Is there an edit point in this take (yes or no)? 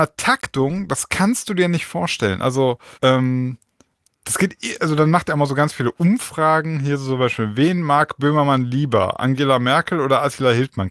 yes